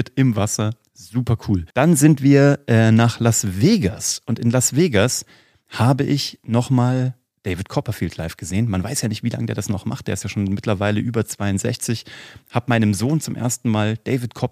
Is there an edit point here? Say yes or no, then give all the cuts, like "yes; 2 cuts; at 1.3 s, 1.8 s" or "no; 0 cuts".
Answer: yes; 1 cut; at 1.7 s